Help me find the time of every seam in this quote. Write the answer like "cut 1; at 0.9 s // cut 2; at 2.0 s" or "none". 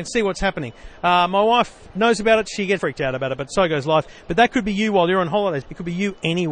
cut 1; at 2.8 s // cut 2; at 5.6 s